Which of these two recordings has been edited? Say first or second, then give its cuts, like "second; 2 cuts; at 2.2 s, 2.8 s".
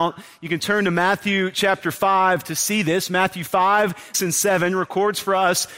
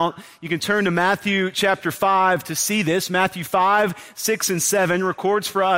first; 1 cut; at 4.1 s